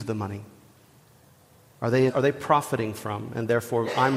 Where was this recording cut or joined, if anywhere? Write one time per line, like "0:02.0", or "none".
0:02.1